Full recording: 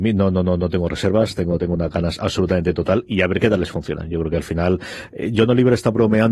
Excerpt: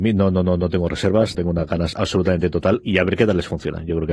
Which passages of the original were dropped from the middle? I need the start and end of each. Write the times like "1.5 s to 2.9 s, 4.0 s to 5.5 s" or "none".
1.3 s to 1.6 s